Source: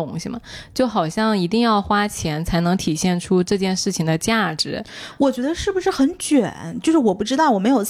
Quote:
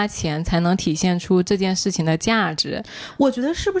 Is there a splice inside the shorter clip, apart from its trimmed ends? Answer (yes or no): no